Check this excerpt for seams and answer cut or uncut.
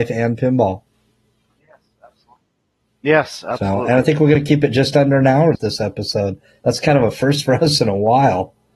cut